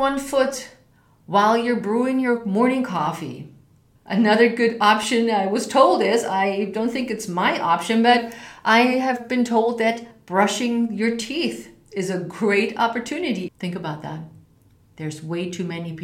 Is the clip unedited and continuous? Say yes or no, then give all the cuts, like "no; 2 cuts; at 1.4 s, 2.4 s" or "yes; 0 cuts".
no; 2 cuts; at 4.0 s, 13.5 s